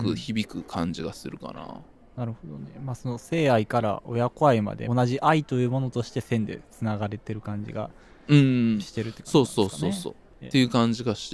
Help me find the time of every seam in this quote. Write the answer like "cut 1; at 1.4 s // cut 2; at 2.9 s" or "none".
cut 1; at 4.9 s